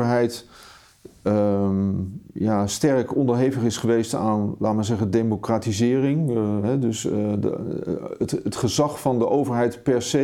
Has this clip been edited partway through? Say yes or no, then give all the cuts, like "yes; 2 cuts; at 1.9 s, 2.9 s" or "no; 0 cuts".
no; 0 cuts